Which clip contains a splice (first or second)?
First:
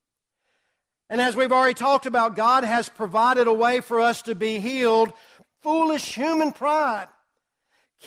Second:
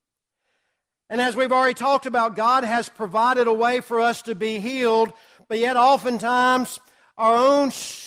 first